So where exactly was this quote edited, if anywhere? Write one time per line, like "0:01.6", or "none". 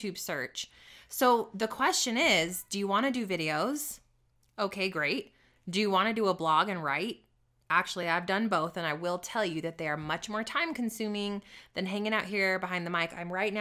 none